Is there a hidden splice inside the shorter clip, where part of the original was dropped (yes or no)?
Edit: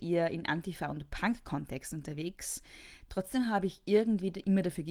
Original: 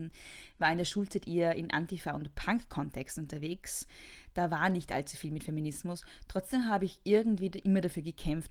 yes